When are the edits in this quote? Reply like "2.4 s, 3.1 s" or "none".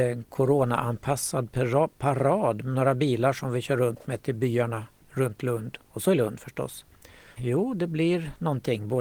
7.4 s